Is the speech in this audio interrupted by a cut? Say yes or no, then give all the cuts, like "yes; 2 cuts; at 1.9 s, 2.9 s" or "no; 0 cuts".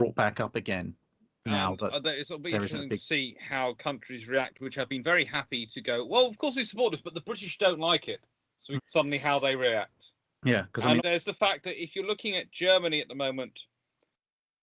yes; 2 cuts; at 8.8 s, 11.0 s